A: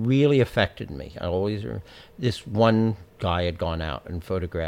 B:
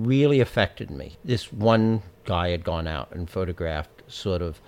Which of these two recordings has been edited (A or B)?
B